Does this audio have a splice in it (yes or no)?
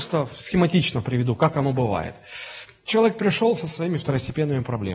no